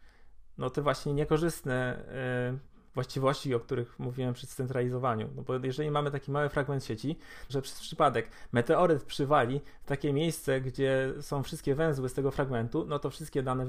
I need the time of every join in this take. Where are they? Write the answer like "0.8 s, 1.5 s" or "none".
7.5 s